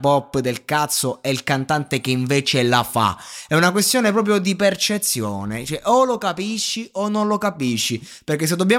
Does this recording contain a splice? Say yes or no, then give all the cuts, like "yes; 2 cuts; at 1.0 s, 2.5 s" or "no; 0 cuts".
no; 0 cuts